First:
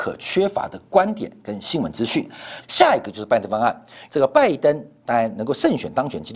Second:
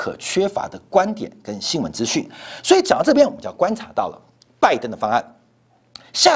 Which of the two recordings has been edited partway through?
first; 2 cuts; at 2.6 s, 4.1 s

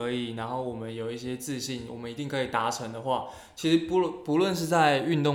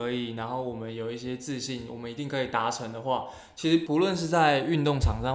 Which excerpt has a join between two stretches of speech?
second; 1 cut; at 3.9 s

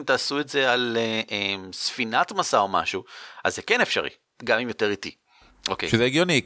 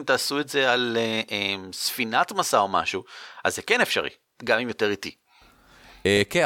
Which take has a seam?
first; 1 cut; at 5.5 s

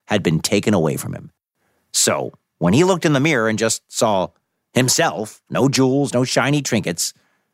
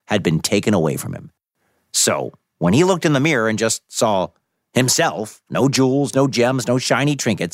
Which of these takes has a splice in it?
first; 1 cut; at 6.1 s

